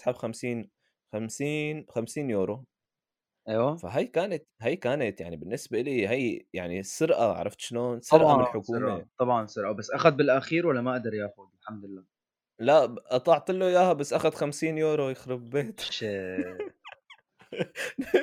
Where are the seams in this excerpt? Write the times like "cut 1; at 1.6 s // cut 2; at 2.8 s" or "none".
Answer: none